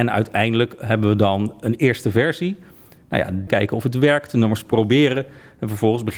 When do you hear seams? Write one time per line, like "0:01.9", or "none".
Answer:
0:03.5